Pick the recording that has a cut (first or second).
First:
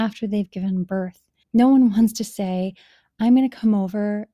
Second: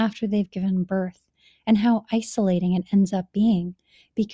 first